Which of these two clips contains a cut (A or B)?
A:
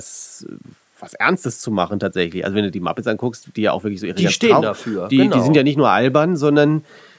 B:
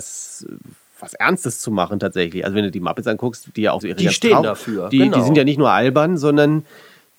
B